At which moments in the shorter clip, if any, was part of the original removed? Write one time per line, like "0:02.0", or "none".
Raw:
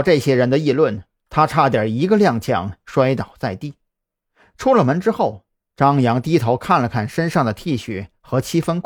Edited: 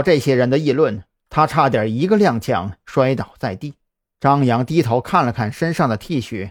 0:04.0

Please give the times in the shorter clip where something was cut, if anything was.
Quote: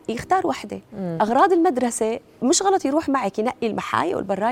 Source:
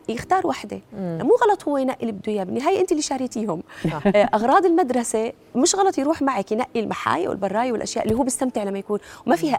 0:01.2

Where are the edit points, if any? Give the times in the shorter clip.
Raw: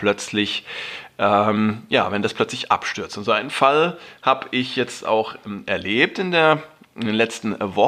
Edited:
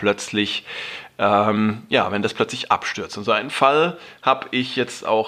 none

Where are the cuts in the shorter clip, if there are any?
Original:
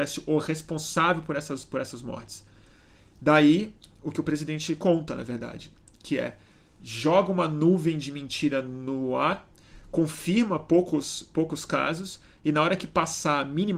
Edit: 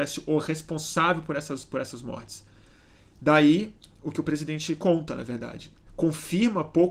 0:05.9

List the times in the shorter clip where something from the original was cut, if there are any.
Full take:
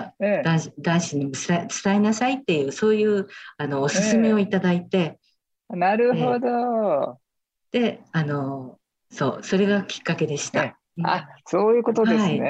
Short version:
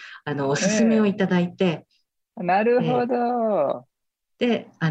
none

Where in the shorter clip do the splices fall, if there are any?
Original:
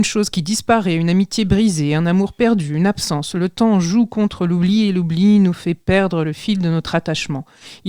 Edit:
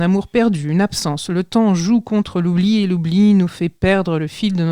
none

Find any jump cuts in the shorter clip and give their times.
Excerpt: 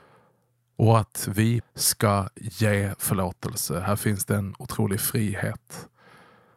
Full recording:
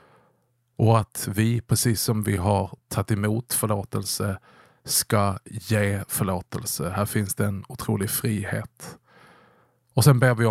0:01.6

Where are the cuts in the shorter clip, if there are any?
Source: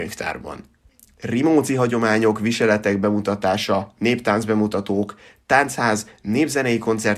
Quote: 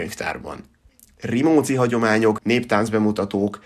0:02.4

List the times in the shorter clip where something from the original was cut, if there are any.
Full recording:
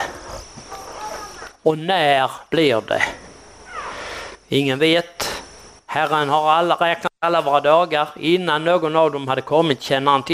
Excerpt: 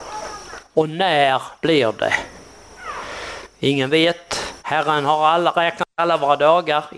0:04.6

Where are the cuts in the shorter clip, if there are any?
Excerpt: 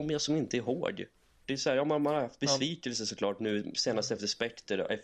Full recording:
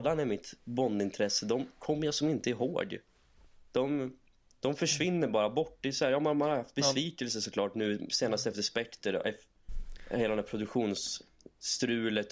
0:01.4

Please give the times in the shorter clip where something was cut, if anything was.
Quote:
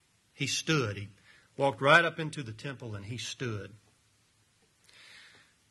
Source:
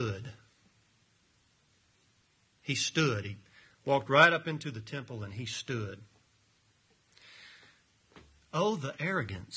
none

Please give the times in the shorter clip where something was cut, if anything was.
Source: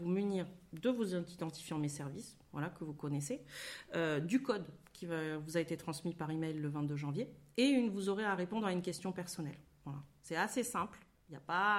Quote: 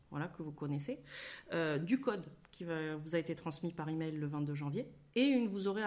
none

